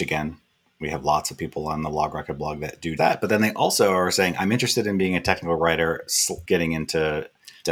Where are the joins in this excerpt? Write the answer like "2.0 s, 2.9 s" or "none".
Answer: 3.0 s, 6.4 s